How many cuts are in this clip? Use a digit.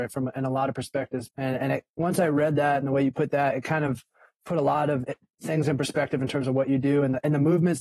1